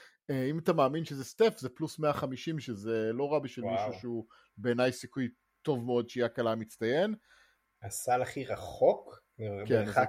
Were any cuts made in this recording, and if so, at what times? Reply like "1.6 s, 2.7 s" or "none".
7.6 s